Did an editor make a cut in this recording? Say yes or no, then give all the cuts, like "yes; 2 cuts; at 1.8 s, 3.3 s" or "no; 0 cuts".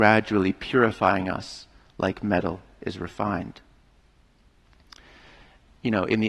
no; 0 cuts